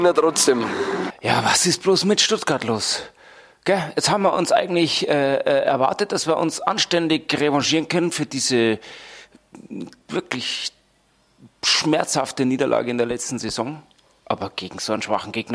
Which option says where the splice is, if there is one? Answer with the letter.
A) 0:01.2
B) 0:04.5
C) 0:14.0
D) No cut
D